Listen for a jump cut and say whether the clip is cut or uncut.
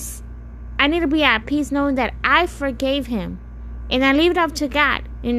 uncut